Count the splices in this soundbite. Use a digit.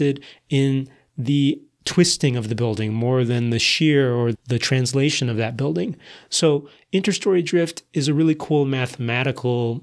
1